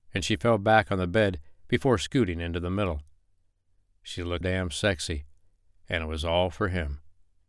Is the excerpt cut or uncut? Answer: cut